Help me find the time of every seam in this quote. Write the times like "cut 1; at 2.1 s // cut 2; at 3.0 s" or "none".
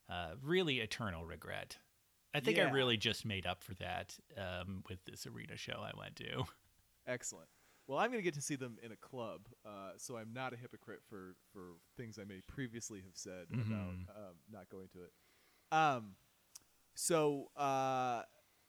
none

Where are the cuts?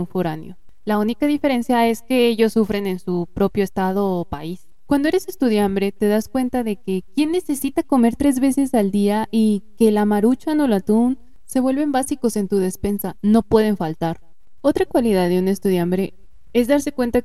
cut 1; at 14.6 s

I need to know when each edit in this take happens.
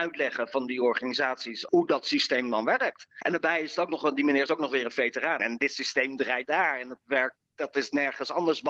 cut 1; at 1.7 s // cut 2; at 3.2 s // cut 3; at 5.4 s

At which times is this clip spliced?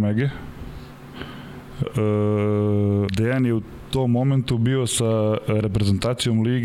cut 1; at 1.8 s // cut 2; at 3.1 s

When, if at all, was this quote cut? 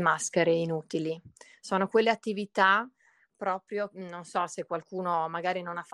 none

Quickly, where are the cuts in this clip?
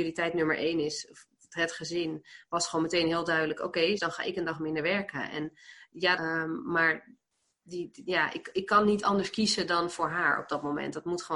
cut 1; at 4.0 s // cut 2; at 6.2 s

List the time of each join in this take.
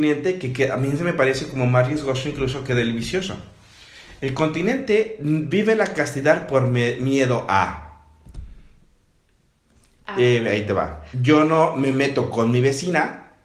cut 1; at 11.1 s

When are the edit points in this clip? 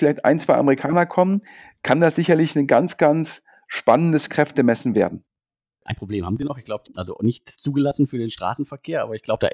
cut 1; at 6.8 s

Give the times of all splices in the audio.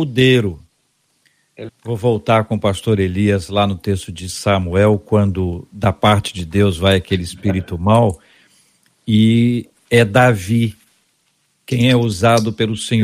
cut 1; at 1.7 s

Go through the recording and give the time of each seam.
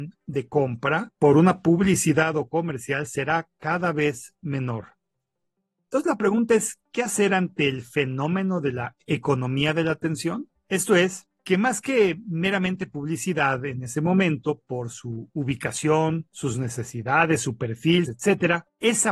cut 1; at 10.6 s // cut 2; at 18.0 s

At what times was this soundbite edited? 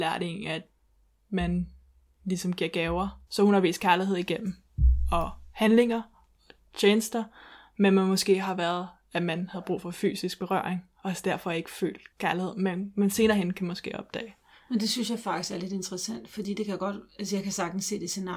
cut 1; at 3.3 s // cut 2; at 12.1 s

